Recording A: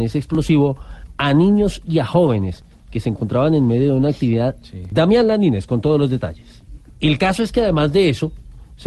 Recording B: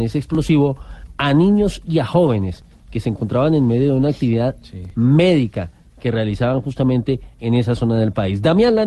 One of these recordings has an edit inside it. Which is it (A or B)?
A